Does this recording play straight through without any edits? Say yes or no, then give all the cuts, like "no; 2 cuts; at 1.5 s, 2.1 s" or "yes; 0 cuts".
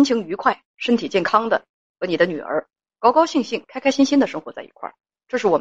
yes; 0 cuts